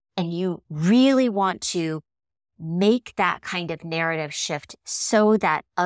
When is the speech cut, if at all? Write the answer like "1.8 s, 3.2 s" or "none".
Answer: none